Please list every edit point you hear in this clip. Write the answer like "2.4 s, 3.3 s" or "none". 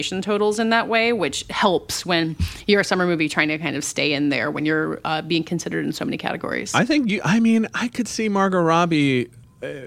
none